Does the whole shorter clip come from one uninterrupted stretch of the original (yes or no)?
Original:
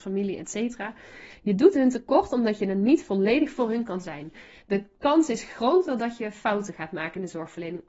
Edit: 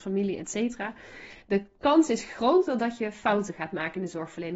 no